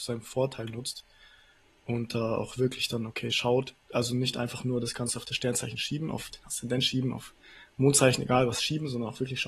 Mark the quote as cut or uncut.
uncut